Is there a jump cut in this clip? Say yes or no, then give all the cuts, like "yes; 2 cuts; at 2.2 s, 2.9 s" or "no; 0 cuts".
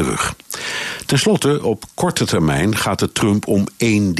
no; 0 cuts